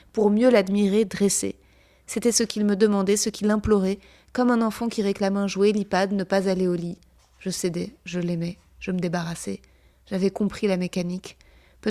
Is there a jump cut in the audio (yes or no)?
no